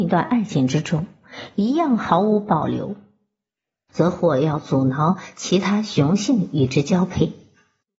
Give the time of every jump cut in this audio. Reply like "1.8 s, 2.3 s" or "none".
3.9 s